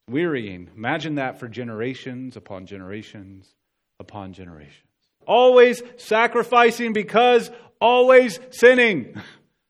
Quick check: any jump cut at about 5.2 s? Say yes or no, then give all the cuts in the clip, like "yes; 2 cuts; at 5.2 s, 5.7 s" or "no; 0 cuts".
yes; 1 cut; at 5.2 s